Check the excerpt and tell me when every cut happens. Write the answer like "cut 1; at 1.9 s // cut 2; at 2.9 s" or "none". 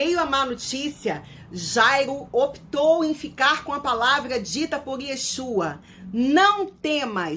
none